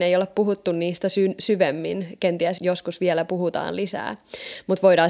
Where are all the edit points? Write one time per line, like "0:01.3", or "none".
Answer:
0:02.6